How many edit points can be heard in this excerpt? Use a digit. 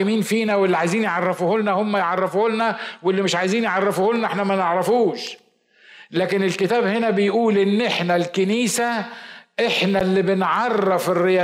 0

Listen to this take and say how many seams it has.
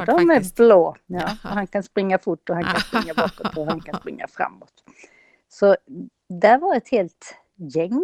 0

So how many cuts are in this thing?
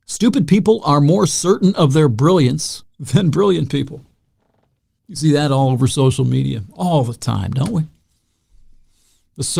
0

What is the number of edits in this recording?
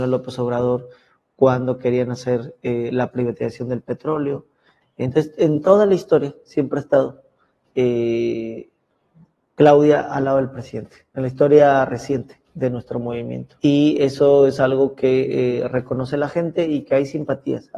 2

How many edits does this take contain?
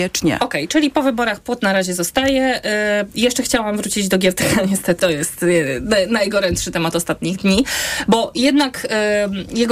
1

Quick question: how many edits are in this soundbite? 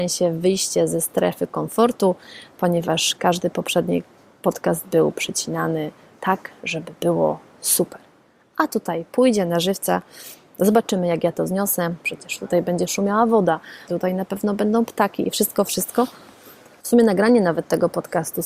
3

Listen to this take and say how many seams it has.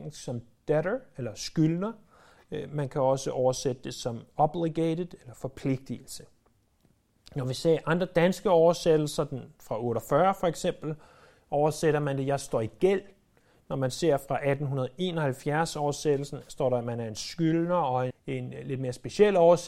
1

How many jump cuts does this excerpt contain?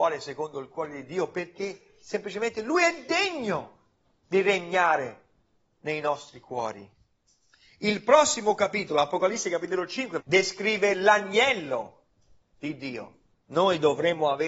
2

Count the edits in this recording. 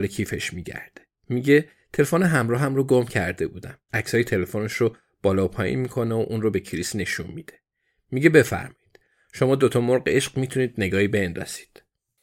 1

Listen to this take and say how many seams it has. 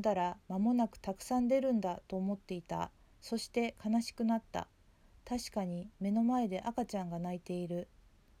1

